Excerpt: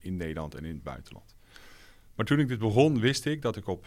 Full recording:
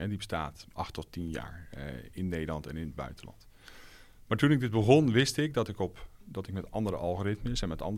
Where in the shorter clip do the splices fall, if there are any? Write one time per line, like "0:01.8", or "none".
none